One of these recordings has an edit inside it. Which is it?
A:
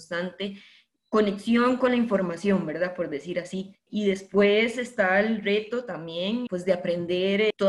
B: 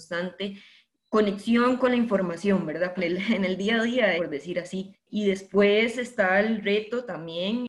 B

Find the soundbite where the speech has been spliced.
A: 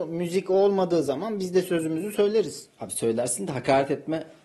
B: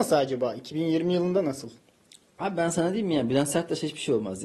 A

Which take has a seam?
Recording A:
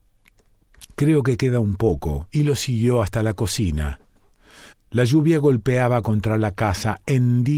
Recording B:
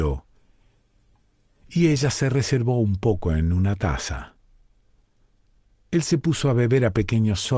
A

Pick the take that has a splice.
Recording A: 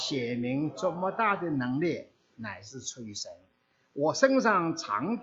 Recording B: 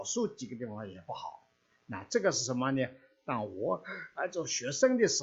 A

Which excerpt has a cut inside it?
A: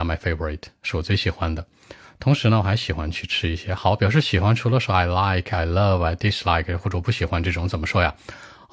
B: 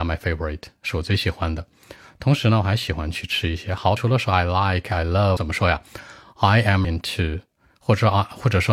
B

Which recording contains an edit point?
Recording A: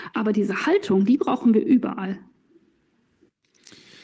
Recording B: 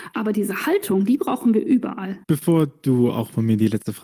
B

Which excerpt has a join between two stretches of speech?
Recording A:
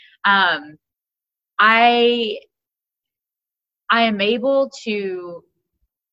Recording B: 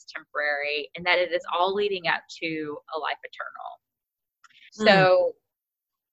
B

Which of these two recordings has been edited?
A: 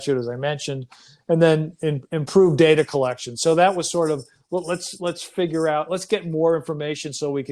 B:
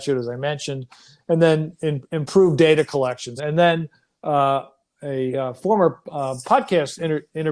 B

